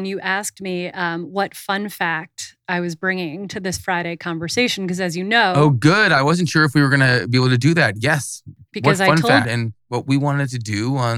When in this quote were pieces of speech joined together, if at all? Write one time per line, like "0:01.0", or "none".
0:09.4